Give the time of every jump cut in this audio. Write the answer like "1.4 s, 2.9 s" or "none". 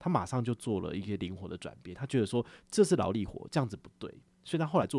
none